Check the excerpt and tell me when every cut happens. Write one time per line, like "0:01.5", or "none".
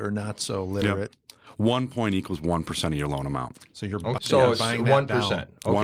0:04.2